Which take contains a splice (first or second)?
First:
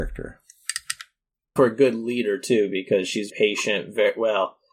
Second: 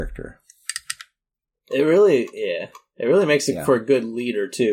first